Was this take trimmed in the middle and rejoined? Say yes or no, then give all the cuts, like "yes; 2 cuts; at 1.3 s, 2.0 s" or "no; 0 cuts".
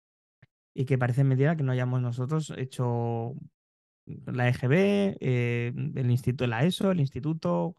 no; 0 cuts